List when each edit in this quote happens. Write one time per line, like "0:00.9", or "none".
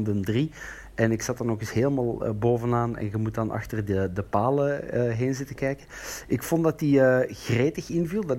none